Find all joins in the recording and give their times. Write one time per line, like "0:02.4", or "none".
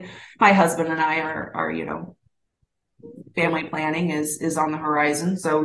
none